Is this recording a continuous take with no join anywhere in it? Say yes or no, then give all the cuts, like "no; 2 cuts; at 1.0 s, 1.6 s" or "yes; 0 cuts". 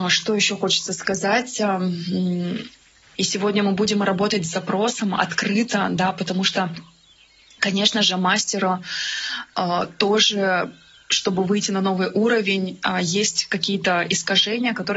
no; 1 cut; at 3.2 s